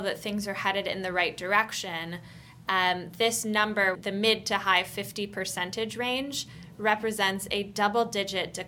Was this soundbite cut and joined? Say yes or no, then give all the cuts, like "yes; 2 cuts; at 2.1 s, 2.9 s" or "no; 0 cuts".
yes; 1 cut; at 3.9 s